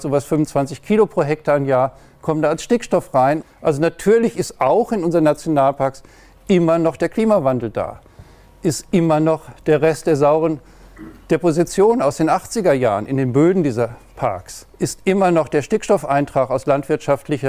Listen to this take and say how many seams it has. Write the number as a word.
two